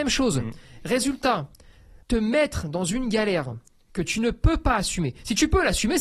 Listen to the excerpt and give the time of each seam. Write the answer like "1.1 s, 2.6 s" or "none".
2.0 s